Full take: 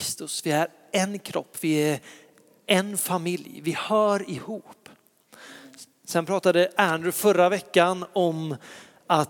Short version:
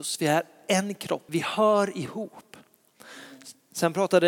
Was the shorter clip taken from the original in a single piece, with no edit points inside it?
no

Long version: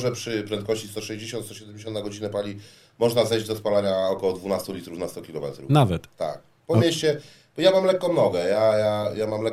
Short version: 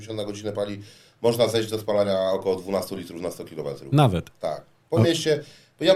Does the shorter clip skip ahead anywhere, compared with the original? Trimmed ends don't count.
no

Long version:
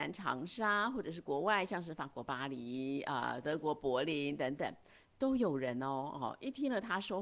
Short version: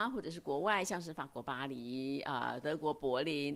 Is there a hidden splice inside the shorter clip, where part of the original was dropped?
no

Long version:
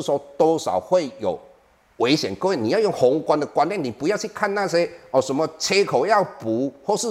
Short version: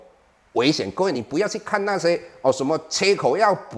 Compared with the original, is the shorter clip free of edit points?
no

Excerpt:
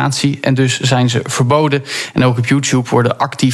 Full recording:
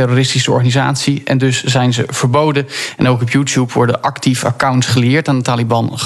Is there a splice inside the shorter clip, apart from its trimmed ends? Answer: no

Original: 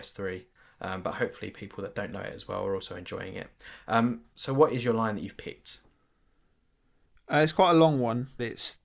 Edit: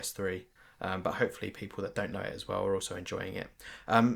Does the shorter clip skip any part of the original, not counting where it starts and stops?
no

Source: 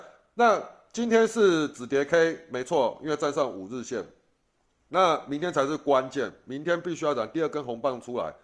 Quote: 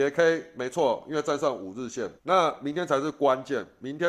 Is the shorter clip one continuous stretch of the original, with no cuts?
no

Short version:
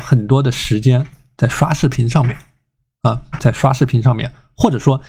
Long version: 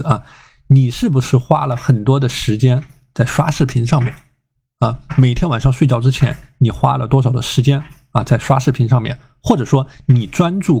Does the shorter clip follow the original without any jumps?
no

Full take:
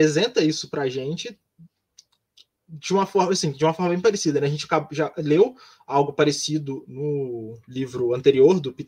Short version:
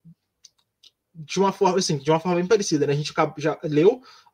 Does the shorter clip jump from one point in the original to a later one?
no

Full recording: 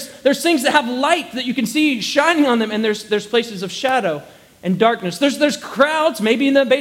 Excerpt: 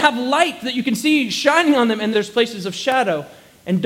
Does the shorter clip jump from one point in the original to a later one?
yes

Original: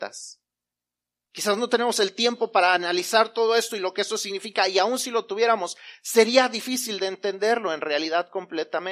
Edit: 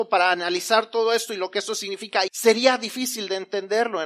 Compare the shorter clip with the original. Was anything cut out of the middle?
yes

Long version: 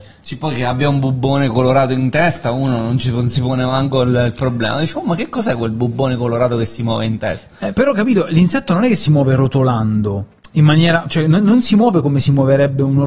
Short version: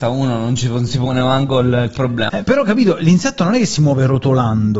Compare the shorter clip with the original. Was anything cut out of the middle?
yes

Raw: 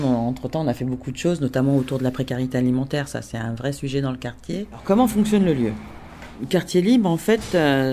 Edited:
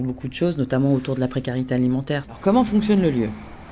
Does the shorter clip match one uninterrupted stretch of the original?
no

